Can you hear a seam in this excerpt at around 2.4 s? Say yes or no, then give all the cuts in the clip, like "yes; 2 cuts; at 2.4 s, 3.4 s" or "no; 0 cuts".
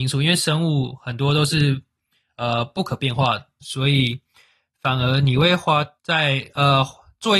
no; 2 cuts; at 3.6 s, 6.0 s